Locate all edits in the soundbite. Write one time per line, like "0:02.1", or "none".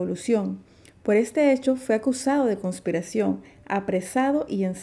none